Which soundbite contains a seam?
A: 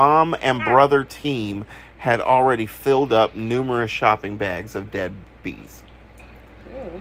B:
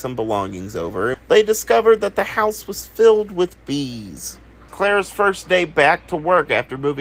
B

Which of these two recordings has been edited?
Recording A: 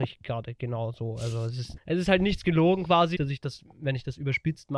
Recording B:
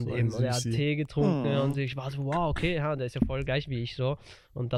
A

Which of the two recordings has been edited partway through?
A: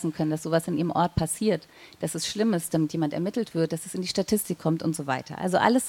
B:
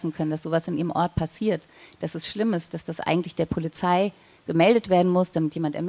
A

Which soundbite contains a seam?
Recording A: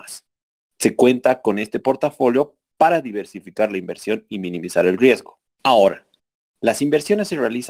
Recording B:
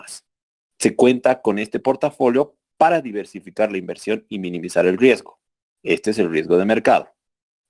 A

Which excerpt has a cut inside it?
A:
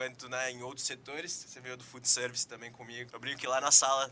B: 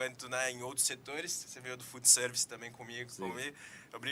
A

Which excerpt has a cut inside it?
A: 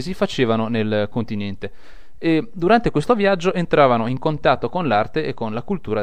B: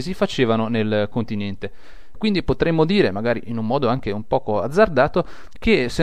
B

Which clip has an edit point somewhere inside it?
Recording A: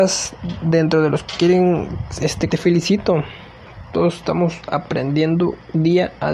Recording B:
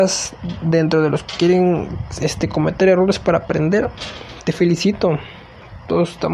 A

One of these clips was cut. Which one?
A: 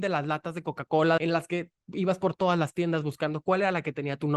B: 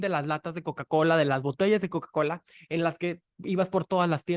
A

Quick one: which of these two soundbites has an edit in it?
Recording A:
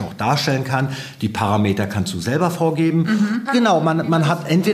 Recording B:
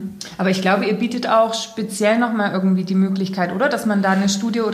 A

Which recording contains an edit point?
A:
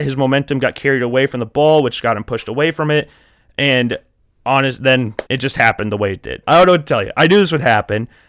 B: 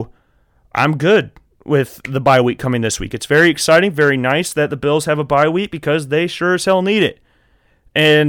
A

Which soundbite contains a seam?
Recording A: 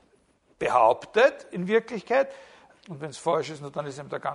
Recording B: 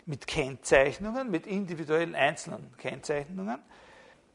A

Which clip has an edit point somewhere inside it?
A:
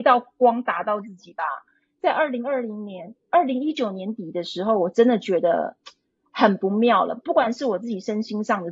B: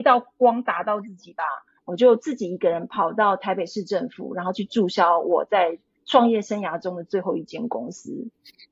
B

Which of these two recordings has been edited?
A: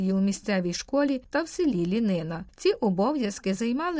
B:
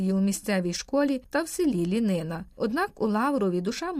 B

